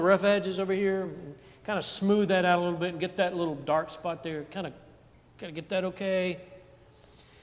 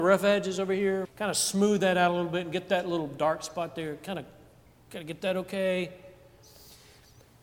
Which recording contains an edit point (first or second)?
second